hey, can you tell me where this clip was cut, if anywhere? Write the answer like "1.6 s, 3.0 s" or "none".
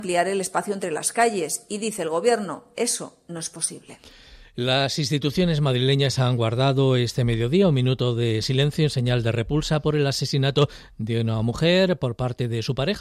none